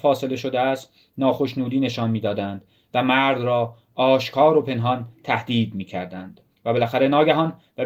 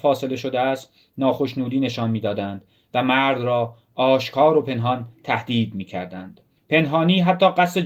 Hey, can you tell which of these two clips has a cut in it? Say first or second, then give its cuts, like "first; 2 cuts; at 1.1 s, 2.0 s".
first; 1 cut; at 6.5 s